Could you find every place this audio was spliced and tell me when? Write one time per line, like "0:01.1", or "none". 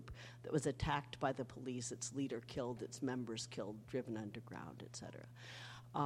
none